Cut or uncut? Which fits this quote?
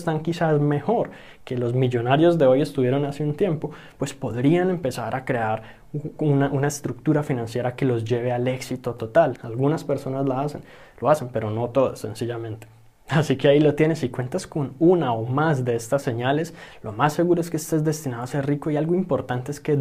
cut